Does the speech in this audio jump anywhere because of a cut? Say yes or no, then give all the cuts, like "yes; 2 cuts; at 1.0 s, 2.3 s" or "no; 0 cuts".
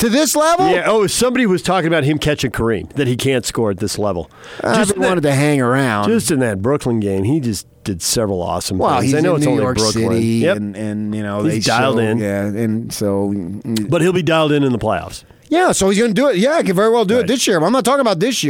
no; 0 cuts